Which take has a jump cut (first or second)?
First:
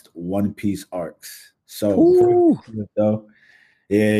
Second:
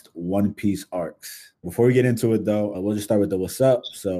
second